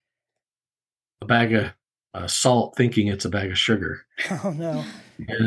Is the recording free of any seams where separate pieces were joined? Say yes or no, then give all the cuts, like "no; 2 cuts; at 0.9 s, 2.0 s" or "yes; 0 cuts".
yes; 0 cuts